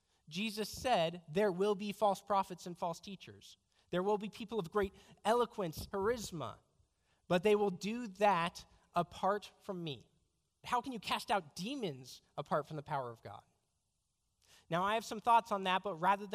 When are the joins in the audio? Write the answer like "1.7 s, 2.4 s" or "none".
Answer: 5.9 s, 10.6 s